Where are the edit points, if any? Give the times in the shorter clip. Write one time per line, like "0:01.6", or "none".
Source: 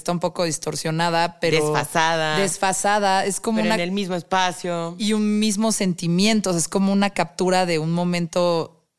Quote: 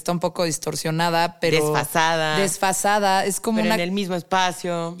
none